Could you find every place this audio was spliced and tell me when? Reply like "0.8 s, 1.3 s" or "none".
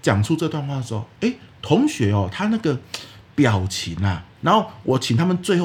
4.4 s

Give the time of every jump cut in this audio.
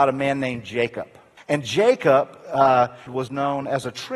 1.4 s, 3.1 s

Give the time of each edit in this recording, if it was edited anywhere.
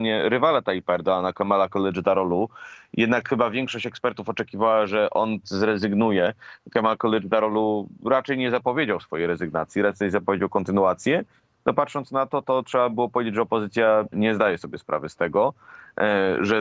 14.1 s

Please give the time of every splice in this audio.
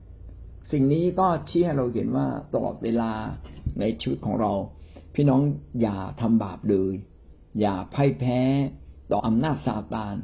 9.2 s

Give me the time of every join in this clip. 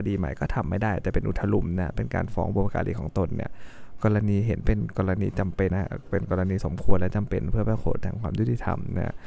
5.7 s

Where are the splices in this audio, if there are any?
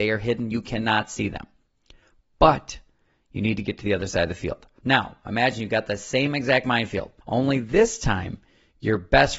4.8 s, 7.2 s

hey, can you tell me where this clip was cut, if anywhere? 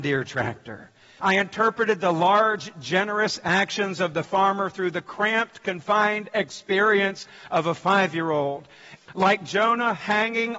1.2 s, 9.0 s

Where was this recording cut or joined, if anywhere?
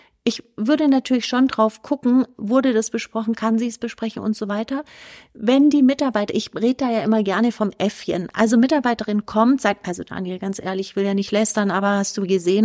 none

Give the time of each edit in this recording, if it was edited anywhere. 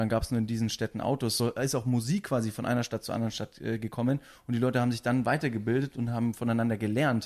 none

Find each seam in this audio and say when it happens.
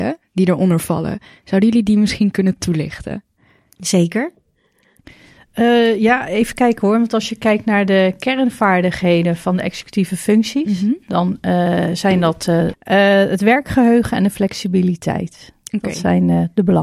12.7 s

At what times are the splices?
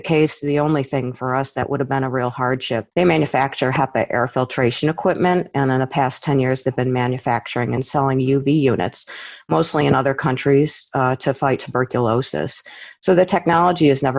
2.9 s

